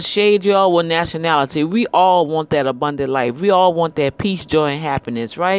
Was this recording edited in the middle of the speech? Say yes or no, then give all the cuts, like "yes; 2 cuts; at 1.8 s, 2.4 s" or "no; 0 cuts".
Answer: no; 0 cuts